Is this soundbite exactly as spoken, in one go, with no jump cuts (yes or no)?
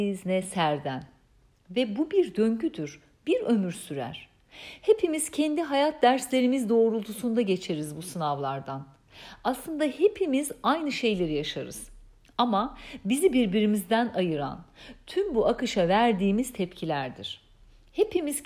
yes